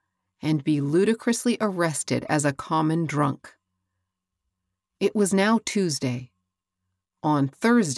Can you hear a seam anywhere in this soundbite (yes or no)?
no